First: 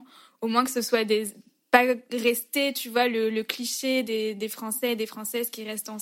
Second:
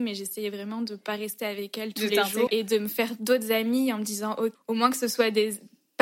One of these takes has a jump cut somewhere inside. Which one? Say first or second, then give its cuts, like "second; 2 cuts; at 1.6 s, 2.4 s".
second; 2 cuts; at 2.5 s, 4.5 s